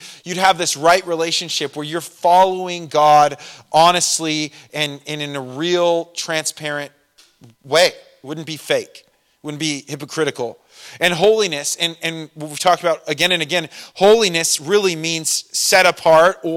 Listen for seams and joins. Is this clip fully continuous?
yes; 0 cuts

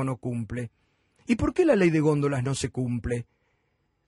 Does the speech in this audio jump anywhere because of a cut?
no; 0 cuts

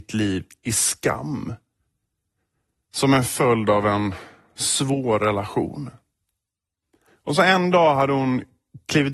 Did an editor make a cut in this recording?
no; 0 cuts

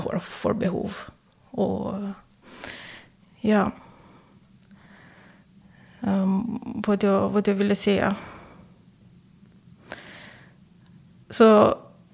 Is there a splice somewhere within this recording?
yes; 1 cut; at 3.2 s

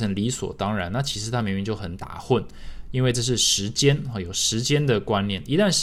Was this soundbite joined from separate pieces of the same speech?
no; 0 cuts

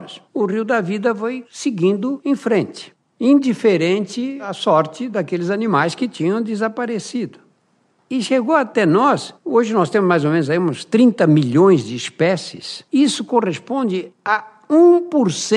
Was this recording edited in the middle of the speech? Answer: no; 0 cuts

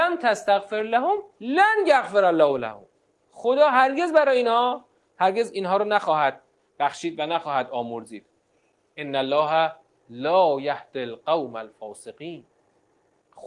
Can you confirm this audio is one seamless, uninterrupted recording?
yes; 0 cuts

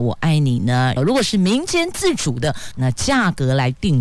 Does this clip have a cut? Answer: yes; 2 cuts; at 1.0 s, 2.7 s

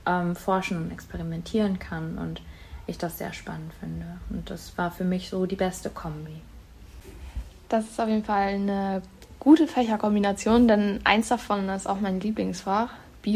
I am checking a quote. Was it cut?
no; 0 cuts

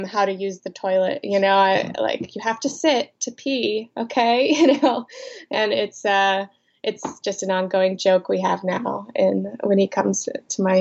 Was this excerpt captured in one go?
yes; 0 cuts

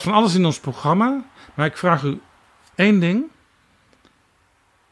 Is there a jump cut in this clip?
no; 0 cuts

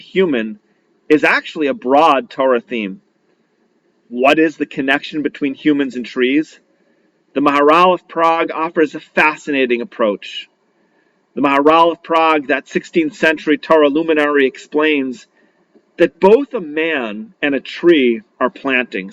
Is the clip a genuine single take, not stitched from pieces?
yes; 0 cuts

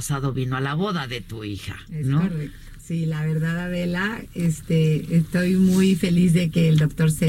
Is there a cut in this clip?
yes; 1 cut; at 2.8 s

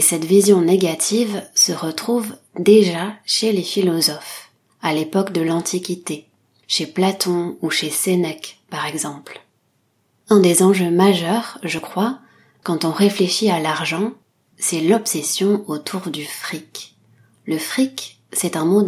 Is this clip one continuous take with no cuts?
yes; 0 cuts

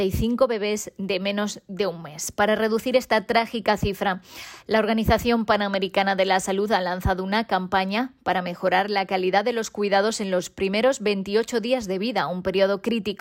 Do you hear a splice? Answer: no; 0 cuts

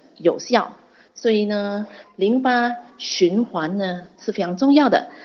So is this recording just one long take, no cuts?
yes; 0 cuts

